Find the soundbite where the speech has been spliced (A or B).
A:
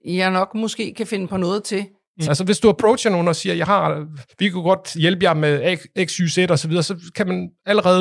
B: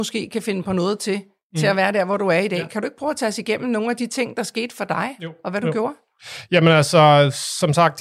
A